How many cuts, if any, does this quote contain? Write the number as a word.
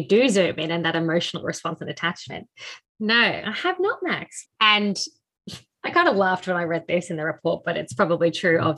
two